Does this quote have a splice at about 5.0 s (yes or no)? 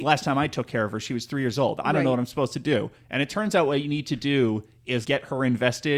yes